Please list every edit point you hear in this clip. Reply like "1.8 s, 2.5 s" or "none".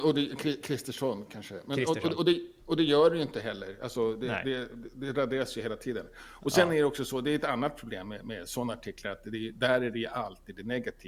none